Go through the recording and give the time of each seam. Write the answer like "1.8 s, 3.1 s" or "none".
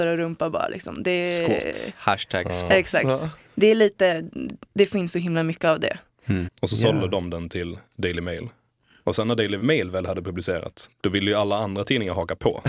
6.5 s